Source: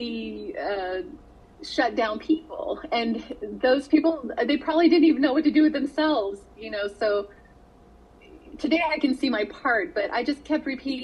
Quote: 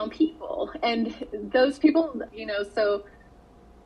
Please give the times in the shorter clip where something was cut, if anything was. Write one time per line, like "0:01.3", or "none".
0:02.3